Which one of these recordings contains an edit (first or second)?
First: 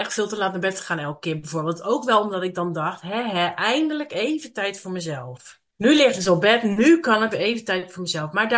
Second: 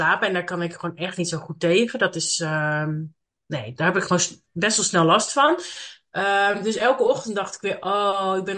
first